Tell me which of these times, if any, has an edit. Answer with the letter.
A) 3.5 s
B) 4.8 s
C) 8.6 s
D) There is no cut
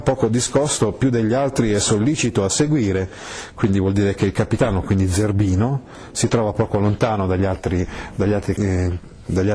C